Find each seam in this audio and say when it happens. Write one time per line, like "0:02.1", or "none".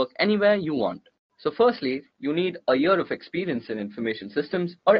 0:01.3